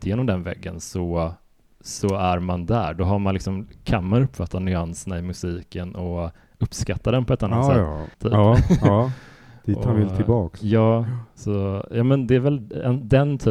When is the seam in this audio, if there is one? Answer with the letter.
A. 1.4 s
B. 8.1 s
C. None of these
B